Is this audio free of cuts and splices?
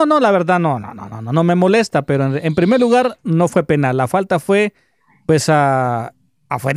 yes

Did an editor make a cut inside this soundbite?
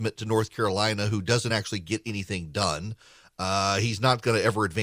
no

